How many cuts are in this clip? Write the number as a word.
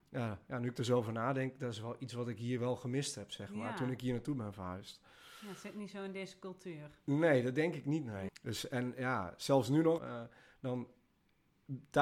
two